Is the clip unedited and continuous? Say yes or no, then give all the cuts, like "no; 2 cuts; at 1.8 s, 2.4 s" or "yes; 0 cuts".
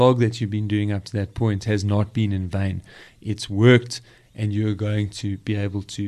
yes; 0 cuts